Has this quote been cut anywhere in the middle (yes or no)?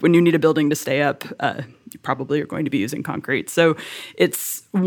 no